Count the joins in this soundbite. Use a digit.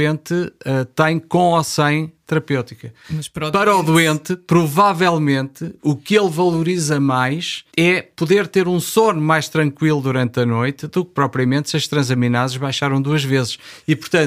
2